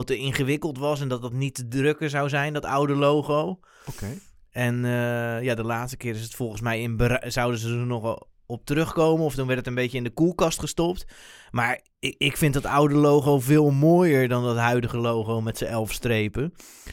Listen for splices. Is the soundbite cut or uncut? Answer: uncut